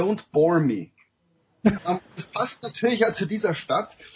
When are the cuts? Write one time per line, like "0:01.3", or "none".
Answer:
0:01.8